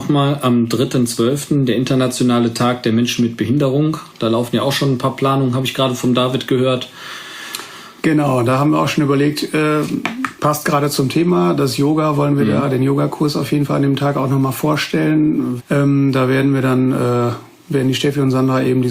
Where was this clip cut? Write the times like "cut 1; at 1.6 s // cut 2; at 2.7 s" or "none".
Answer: cut 1; at 15.6 s